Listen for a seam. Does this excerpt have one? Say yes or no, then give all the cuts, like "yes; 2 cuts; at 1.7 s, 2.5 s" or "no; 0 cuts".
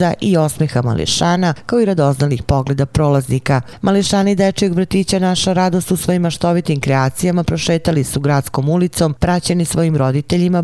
no; 0 cuts